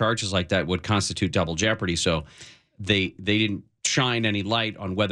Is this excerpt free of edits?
yes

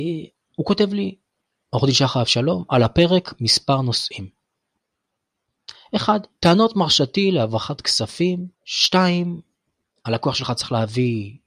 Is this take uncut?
no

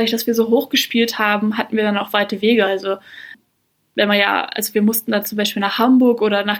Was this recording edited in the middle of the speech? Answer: no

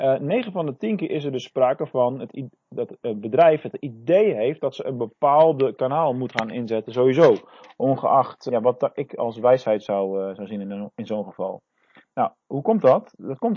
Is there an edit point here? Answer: yes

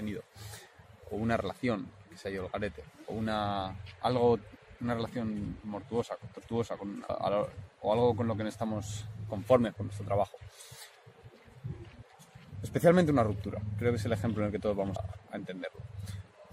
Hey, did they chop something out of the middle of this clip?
yes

